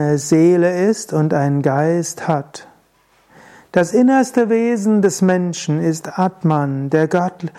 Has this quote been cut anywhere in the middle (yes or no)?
no